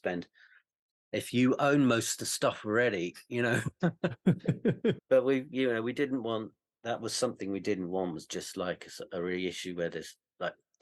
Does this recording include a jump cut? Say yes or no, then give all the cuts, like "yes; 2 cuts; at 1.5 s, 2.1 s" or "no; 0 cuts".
yes; 1 cut; at 5.0 s